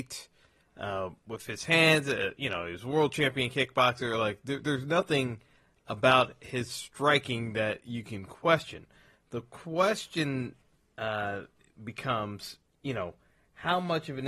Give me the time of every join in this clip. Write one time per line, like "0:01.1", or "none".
none